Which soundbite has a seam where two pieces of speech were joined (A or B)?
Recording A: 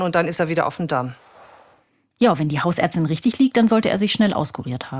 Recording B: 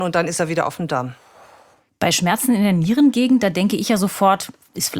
B